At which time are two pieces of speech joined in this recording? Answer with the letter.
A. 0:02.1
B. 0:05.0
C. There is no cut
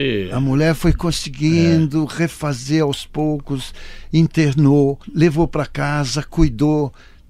B